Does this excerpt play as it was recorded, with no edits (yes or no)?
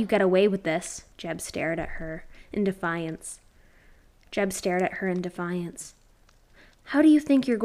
no